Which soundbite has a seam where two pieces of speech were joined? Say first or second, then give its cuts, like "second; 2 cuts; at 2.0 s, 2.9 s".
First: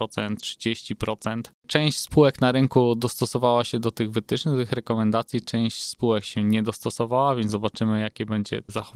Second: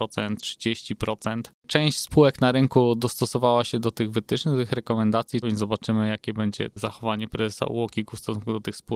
second; 1 cut; at 5.4 s